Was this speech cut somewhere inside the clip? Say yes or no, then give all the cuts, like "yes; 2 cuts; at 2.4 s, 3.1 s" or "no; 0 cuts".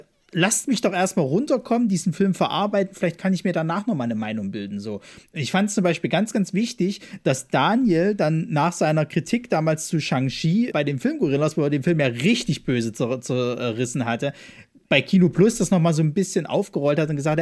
yes; 1 cut; at 10.7 s